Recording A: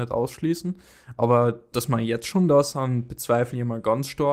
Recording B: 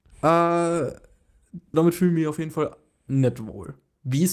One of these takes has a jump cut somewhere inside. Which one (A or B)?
B